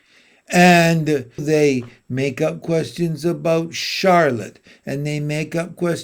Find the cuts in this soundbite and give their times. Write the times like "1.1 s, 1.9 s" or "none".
1.4 s